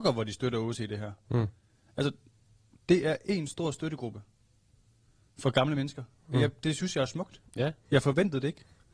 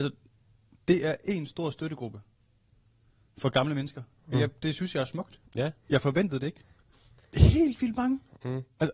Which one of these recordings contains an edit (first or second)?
second